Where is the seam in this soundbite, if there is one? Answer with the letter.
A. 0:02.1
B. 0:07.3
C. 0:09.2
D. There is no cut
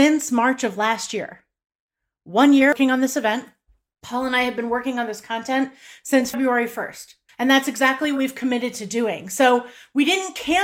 B